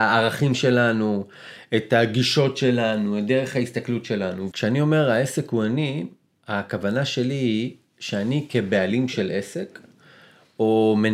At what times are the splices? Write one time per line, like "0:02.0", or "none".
0:04.5